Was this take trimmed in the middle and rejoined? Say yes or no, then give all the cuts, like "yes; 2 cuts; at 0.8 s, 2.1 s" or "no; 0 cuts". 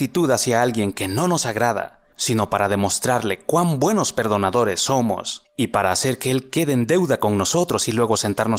yes; 1 cut; at 2.1 s